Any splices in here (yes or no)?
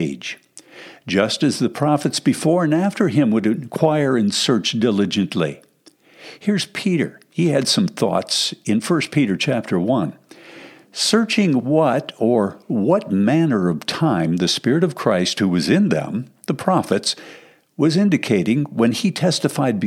no